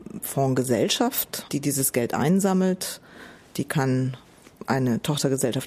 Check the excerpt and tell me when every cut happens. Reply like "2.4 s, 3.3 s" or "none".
1.5 s